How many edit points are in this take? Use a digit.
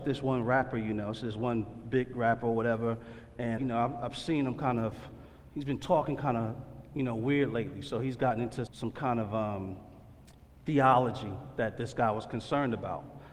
3